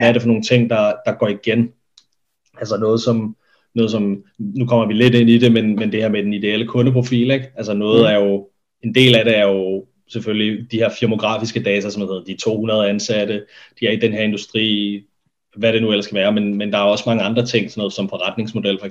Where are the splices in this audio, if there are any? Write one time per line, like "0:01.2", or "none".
none